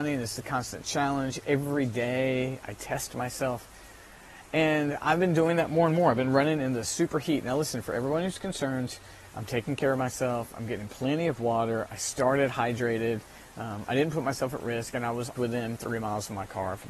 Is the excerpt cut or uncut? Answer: cut